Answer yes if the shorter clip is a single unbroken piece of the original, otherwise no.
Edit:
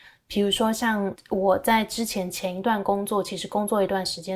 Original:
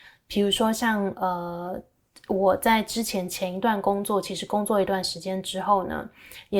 no